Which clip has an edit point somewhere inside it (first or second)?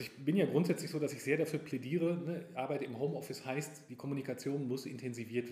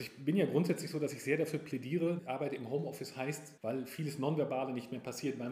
second